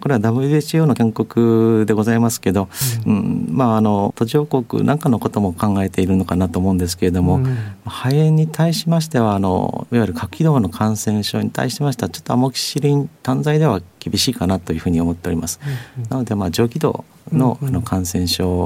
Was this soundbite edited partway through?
no; 0 cuts

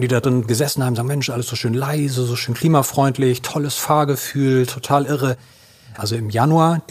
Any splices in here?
yes; 1 cut; at 6.0 s

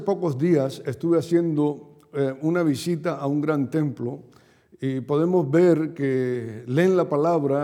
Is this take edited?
no; 0 cuts

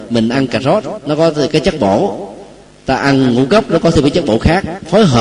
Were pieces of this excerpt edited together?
no; 0 cuts

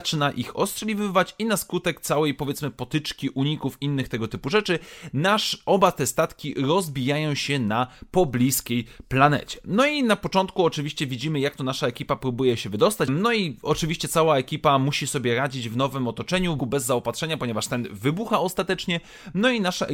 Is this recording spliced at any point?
yes; 2 cuts; at 13.1 s, 16.6 s

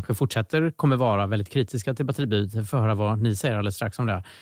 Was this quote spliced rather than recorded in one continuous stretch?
no; 0 cuts

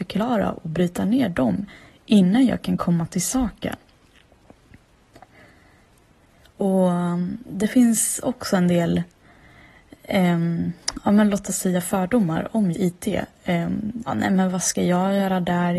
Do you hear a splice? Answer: yes; 2 cuts; at 12.7 s, 14.1 s

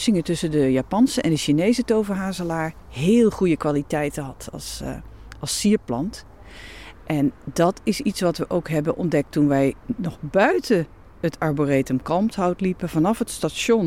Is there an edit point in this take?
yes; 2 cuts; at 6.9 s, 9.8 s

